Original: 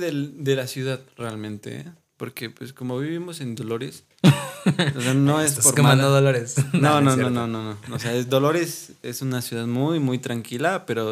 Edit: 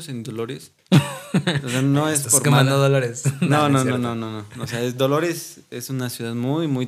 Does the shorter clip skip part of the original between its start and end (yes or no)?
no